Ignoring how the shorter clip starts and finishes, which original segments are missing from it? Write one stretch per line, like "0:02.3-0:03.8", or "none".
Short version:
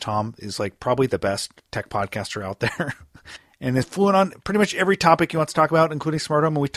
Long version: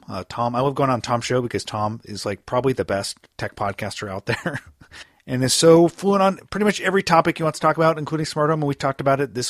0:05.5-0:05.9